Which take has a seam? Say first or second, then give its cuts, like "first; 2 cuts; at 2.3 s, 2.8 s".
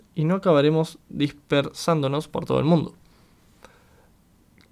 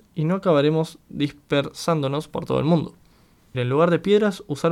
second; 1 cut; at 3.5 s